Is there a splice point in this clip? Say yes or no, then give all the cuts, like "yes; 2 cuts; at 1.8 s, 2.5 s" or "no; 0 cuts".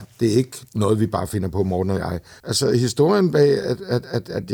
yes; 1 cut; at 2.4 s